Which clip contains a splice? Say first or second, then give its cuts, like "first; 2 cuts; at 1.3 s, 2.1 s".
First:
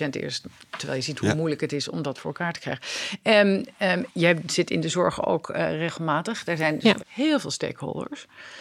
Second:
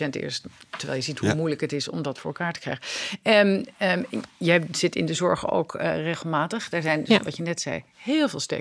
first; 2 cuts; at 4.1 s, 7.0 s